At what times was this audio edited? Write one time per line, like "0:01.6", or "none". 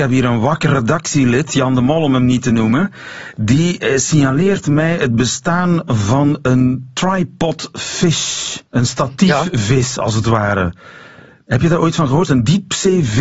0:08.7